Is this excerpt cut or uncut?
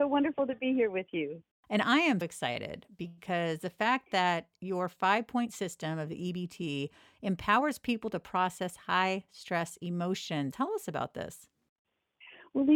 cut